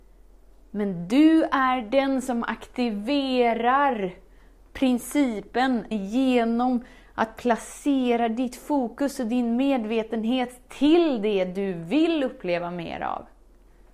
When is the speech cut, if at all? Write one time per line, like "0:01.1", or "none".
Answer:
0:05.9